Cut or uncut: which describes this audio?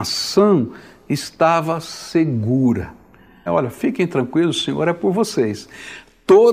cut